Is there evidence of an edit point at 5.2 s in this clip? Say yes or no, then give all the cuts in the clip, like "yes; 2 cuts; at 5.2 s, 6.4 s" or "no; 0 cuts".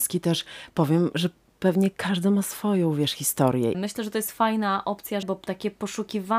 yes; 2 cuts; at 3.7 s, 5.2 s